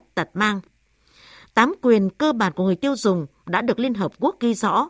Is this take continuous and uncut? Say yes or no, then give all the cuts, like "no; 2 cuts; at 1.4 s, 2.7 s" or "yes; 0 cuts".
yes; 0 cuts